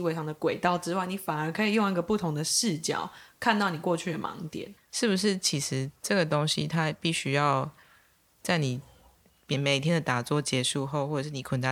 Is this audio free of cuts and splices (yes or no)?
no